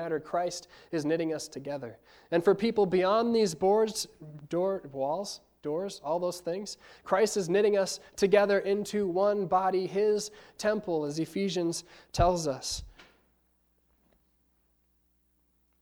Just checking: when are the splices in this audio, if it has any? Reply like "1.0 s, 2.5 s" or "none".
none